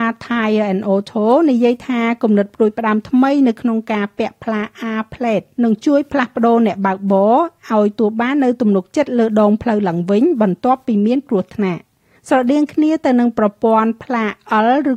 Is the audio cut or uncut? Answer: cut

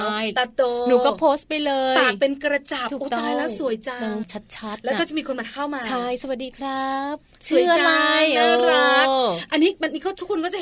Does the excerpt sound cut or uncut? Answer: cut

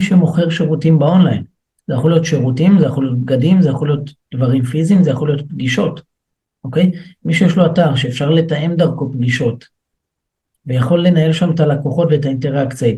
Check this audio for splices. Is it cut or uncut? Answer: uncut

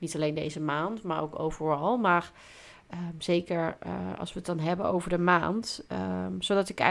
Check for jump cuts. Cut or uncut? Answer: uncut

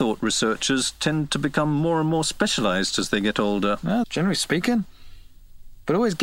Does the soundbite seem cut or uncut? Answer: cut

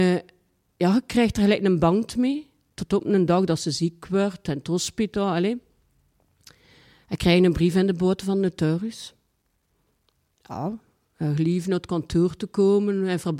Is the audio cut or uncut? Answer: uncut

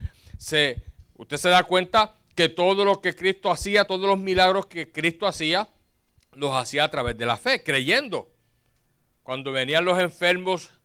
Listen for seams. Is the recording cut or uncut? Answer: uncut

